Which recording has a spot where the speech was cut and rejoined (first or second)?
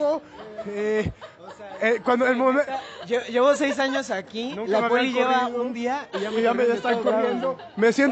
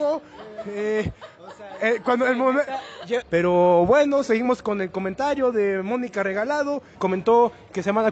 second